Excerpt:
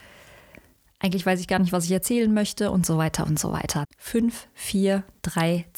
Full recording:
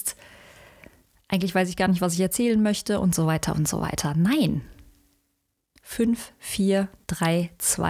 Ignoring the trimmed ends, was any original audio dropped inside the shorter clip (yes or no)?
yes